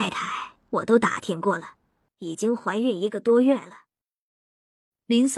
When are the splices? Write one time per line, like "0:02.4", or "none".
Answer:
0:02.1